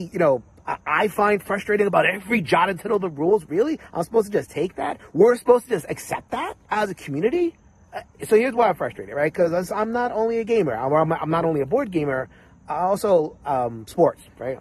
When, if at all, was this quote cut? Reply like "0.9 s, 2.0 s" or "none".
6.6 s, 8.2 s